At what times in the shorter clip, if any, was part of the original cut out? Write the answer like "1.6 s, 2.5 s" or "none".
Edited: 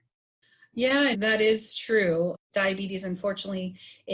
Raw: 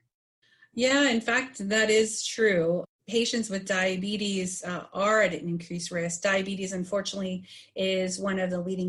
1.1 s, 2.5 s